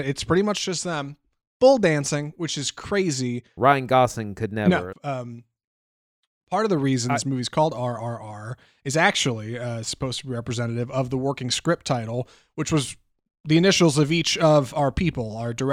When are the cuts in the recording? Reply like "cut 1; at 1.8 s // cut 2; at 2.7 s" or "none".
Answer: cut 1; at 3.6 s // cut 2; at 4.9 s